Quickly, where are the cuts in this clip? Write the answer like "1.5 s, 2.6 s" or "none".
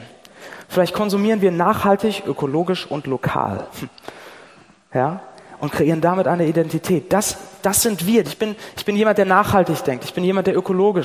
8.2 s